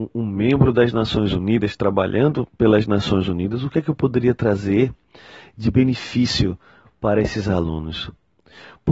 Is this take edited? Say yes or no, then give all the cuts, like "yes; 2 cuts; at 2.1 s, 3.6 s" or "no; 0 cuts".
no; 0 cuts